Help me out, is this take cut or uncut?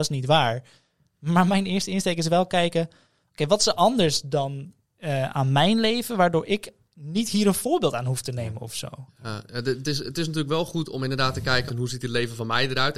cut